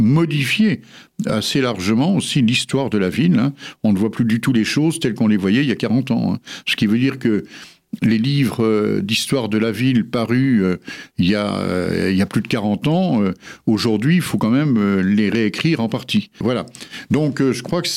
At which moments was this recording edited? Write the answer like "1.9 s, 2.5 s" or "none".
16.4 s